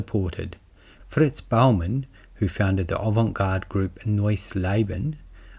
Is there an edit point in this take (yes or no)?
yes